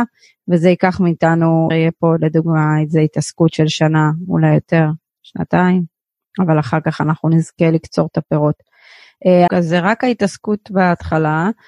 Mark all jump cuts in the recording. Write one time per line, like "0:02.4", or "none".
0:01.7
0:09.5